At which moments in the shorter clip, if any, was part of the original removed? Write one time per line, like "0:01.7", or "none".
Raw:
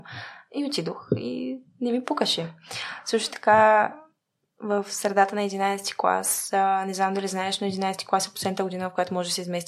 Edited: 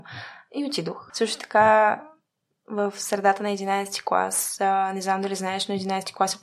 0:01.1